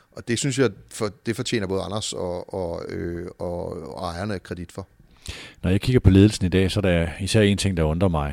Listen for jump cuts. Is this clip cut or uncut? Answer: uncut